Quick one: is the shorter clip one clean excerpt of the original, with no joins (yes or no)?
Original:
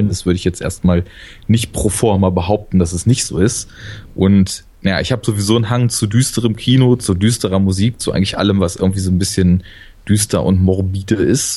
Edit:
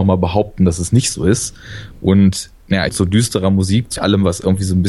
no